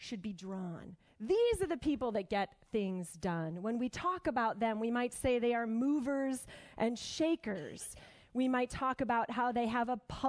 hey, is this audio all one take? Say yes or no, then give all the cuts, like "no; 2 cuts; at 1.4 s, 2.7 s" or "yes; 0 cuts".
no; 1 cut; at 1.1 s